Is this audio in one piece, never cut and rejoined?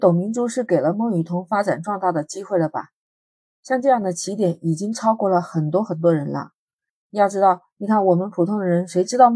yes; 0 cuts

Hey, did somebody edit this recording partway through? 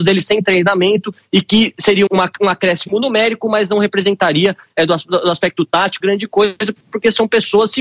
yes; 2 cuts; at 2.1 s, 6.0 s

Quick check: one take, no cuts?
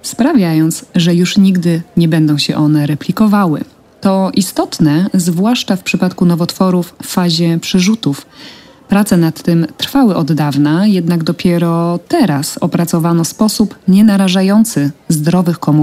yes; 0 cuts

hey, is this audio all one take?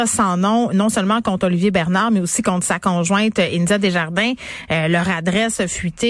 yes; 0 cuts

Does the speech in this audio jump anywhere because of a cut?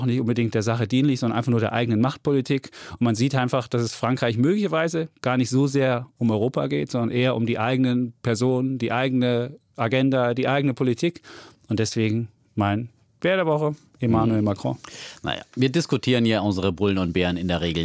no; 0 cuts

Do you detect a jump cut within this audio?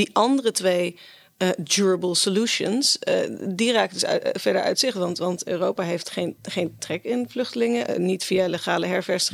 no; 0 cuts

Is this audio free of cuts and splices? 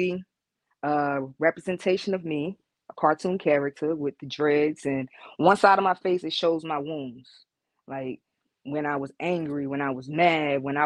yes; 0 cuts

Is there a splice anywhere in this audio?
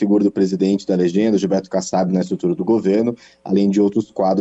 no; 0 cuts

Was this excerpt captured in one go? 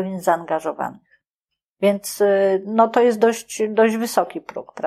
yes; 0 cuts

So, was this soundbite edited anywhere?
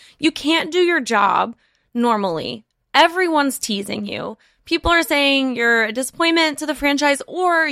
no; 0 cuts

